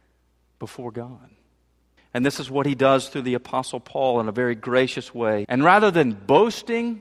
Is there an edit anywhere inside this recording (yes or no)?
yes